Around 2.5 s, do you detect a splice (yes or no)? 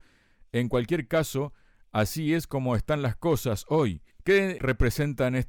no